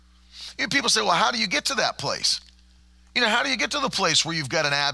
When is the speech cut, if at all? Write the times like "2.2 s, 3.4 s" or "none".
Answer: none